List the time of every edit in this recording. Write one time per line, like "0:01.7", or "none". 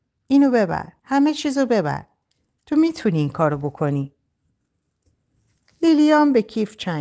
0:01.0

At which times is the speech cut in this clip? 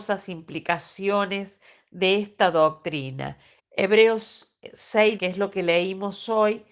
0:03.6
0:05.2

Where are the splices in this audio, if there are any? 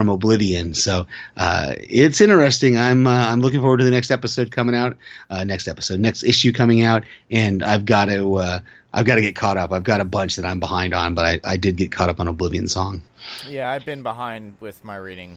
none

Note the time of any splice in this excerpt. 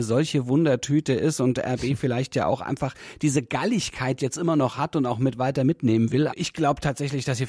0:06.3

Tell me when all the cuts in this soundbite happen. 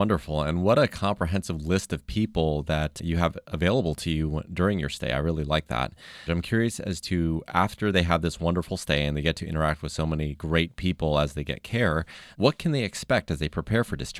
0:06.3

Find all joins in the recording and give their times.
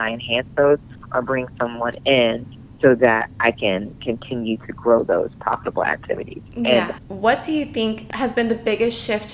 0:07.0

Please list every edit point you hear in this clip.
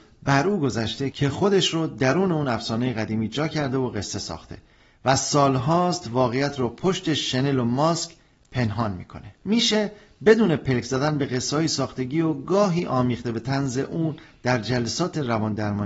0:09.4

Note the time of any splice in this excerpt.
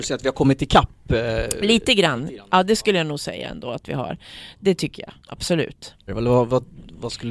0:06.1

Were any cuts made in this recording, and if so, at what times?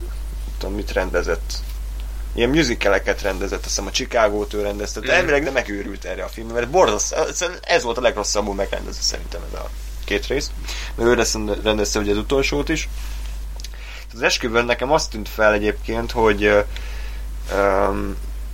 0:05.4

